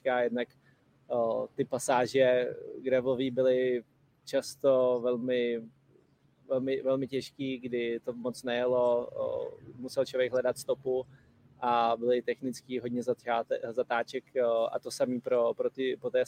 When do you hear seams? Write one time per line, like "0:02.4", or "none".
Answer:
none